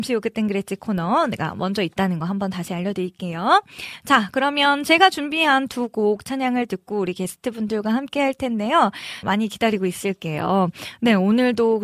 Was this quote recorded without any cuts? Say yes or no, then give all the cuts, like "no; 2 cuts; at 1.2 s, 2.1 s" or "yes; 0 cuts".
no; 1 cut; at 9.2 s